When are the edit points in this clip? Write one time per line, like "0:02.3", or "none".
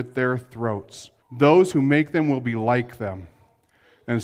0:01.2

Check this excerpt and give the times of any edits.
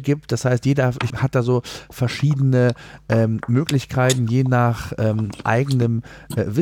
0:01.1

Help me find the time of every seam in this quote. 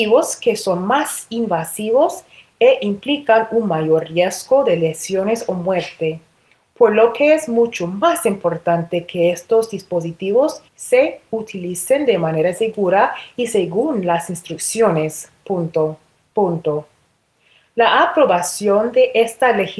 0:10.7
0:16.3

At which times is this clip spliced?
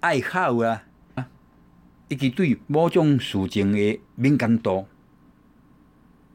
0:01.2
0:02.6
0:04.0

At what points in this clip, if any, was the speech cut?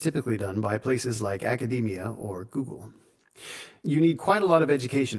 none

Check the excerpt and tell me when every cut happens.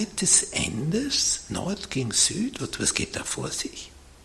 0:02.6

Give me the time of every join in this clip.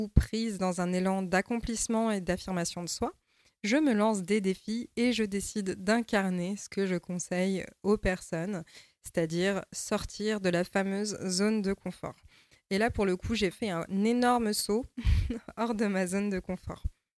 0:13.5

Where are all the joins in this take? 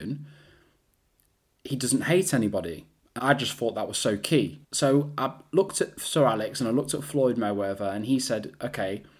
0:03.2
0:04.6

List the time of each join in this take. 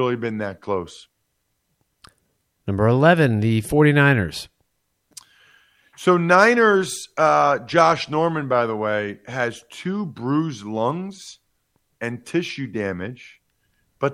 none

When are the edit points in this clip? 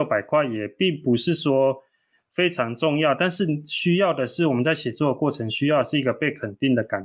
none

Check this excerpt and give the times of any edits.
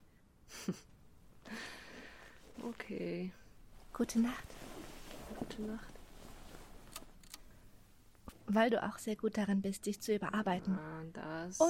0:08.3

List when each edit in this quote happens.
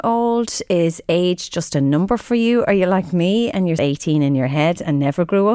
0:03.8

